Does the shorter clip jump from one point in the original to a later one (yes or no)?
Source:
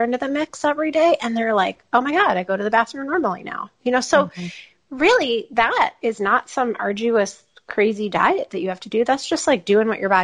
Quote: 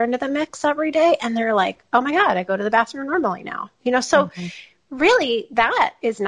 no